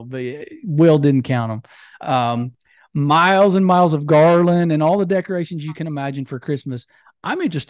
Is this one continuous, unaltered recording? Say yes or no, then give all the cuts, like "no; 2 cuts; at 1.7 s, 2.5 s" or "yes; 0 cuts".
yes; 0 cuts